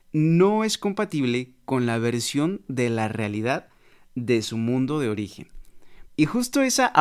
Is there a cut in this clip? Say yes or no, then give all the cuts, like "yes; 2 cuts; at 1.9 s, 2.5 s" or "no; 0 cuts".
yes; 1 cut; at 6.1 s